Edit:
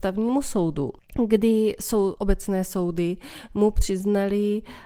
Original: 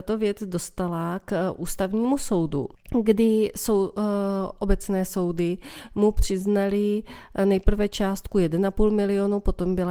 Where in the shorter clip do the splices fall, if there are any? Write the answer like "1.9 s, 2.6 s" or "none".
2.1 s

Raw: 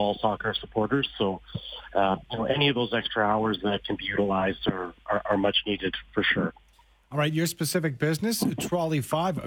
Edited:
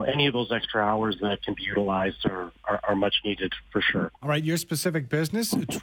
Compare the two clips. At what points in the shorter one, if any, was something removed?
4.2 s

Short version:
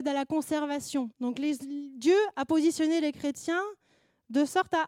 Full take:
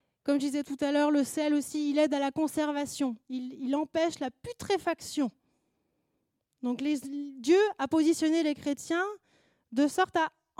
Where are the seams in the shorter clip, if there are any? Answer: 1.1 s

